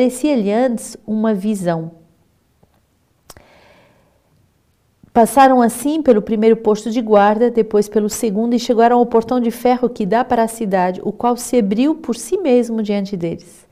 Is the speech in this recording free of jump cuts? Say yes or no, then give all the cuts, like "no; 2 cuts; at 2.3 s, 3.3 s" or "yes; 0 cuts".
yes; 0 cuts